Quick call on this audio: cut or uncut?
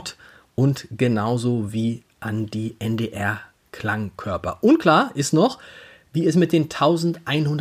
uncut